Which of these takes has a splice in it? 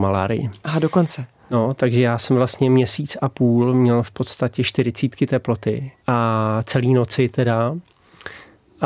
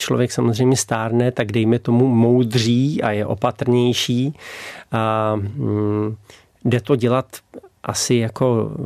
first; 2 cuts; at 1.8 s, 6.0 s

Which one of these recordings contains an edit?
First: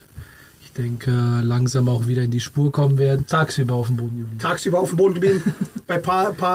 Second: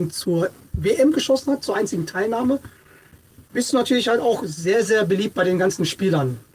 first; 1 cut; at 3.2 s

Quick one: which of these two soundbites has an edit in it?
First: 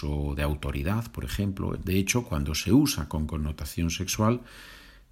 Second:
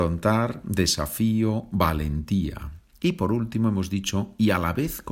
first; 1 cut; at 1.8 s

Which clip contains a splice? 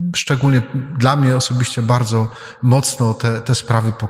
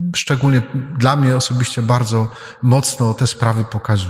second; 1 cut; at 3.2 s

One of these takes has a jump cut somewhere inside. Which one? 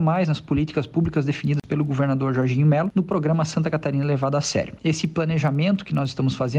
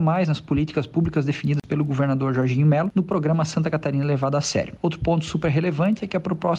first; 1 cut; at 4.8 s

